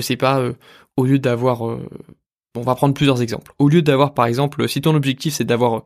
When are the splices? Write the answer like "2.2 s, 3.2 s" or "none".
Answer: none

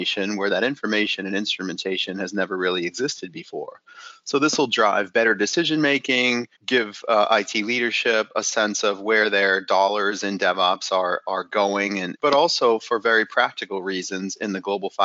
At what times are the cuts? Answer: 6.5 s, 12.2 s

